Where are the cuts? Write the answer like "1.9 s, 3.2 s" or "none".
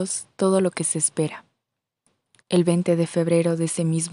2.4 s